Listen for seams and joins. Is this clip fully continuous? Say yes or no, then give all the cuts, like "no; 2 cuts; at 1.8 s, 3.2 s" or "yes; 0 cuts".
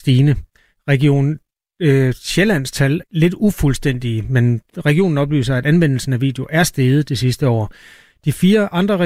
no; 2 cuts; at 3.0 s, 4.7 s